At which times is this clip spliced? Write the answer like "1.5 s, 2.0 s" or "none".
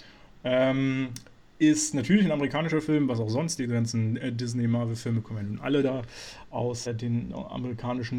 6.9 s